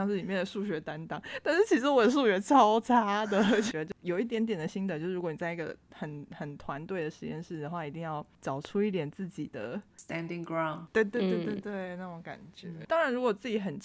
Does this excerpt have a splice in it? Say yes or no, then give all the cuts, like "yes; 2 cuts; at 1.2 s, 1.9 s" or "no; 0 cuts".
no; 0 cuts